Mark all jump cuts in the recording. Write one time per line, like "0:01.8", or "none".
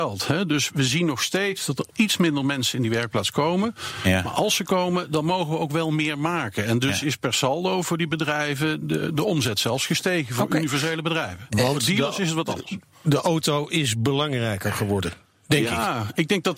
none

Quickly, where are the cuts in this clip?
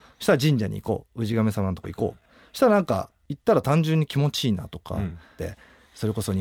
0:05.4

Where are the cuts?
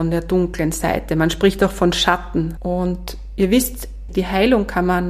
0:02.6
0:04.1

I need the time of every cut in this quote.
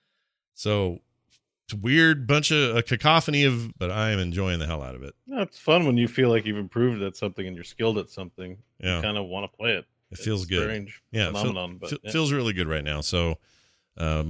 0:03.7

